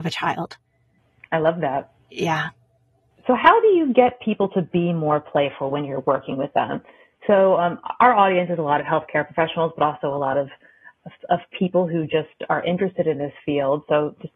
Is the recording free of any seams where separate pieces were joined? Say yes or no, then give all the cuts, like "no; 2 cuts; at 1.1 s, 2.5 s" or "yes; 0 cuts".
yes; 0 cuts